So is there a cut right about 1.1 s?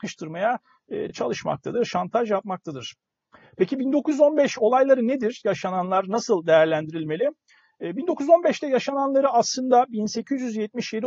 no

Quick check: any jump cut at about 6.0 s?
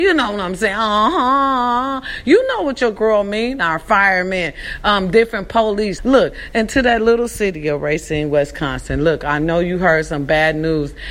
yes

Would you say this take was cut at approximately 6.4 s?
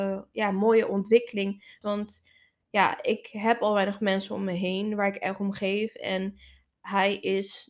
no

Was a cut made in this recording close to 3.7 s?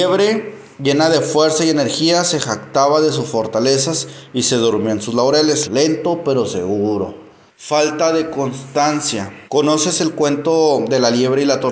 no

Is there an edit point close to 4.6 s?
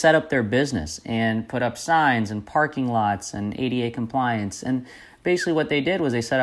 no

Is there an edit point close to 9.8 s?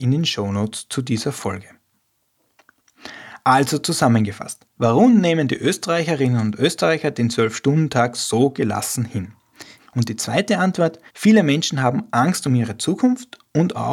yes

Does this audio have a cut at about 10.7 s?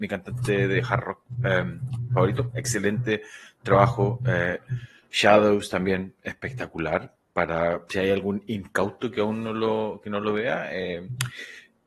no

